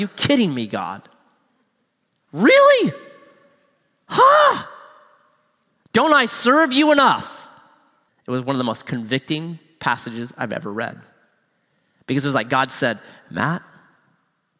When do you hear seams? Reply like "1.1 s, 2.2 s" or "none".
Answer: 8.1 s